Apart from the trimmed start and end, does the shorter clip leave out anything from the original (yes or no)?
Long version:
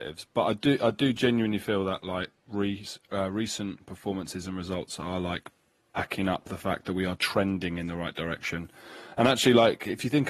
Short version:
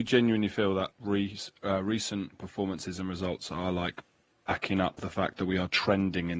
yes